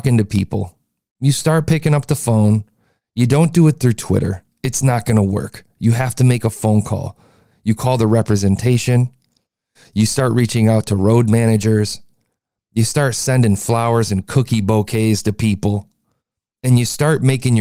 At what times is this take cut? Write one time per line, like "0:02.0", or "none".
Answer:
none